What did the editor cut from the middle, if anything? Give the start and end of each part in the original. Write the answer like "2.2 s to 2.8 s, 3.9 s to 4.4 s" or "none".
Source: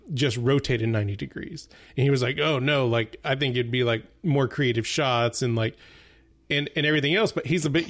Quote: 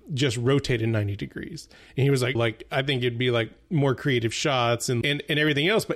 2.4 s to 2.9 s, 5.5 s to 6.5 s